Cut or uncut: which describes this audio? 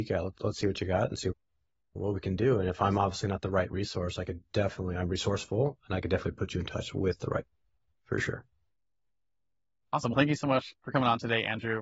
uncut